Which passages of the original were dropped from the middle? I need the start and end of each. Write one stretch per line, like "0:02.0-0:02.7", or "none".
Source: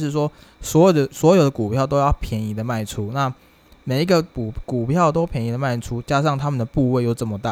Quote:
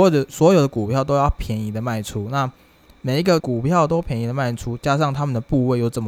0:04.2-0:04.6